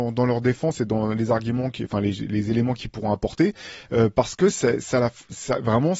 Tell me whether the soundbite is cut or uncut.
uncut